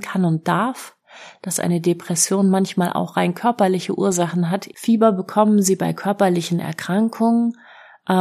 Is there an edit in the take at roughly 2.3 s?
no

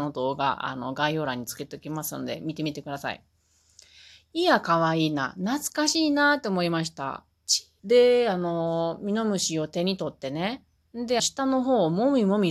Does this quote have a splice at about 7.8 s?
yes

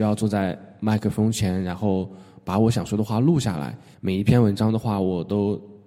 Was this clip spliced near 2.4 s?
no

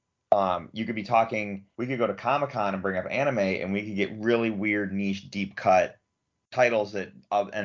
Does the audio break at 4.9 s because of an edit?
no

